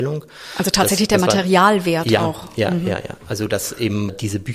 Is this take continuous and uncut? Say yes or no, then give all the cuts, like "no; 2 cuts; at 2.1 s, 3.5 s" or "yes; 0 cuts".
yes; 0 cuts